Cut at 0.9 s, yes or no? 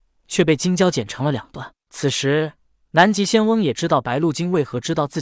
yes